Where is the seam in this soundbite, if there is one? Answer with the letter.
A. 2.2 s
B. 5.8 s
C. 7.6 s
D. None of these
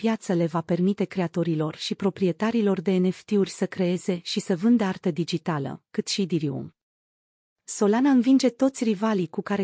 B